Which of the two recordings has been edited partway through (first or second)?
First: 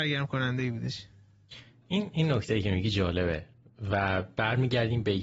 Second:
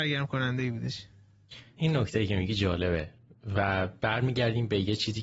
second